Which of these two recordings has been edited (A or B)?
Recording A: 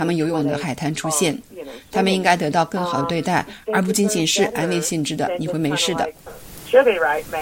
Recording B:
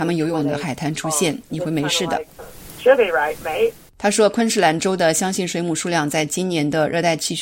B